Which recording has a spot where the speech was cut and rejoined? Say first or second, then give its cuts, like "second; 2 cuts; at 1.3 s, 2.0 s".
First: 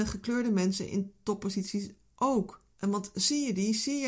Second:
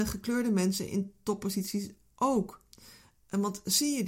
first; 1 cut; at 2.7 s